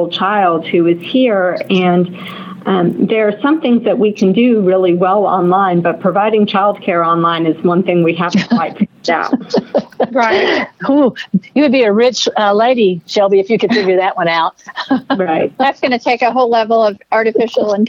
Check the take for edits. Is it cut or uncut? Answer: uncut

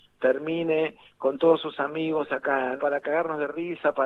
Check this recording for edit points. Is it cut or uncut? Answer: cut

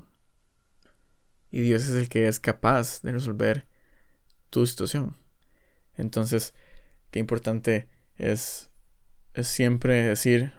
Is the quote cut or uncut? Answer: uncut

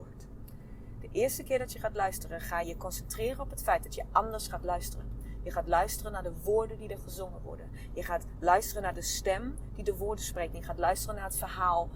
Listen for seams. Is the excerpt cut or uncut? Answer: cut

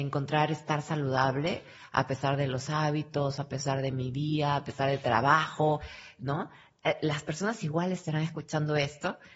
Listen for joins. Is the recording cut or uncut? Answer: uncut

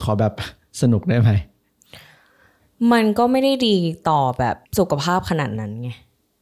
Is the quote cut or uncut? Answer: cut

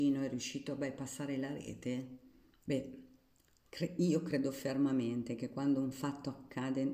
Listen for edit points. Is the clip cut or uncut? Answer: cut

